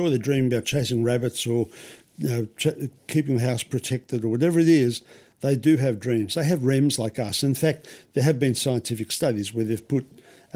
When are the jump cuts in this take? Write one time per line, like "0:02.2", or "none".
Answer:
none